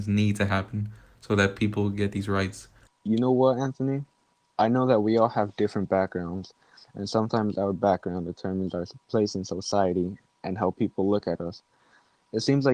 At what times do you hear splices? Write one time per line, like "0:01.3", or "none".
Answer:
0:02.9